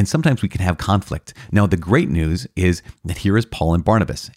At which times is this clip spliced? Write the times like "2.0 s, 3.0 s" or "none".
none